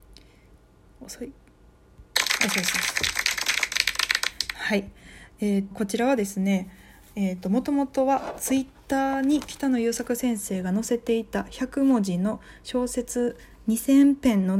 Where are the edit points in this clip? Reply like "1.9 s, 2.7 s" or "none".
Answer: 5.7 s